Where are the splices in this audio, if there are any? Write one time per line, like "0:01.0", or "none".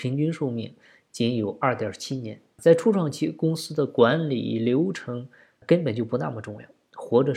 0:02.6
0:05.6